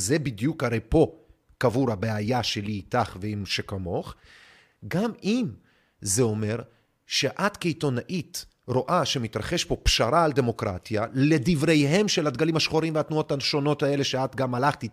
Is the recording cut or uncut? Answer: uncut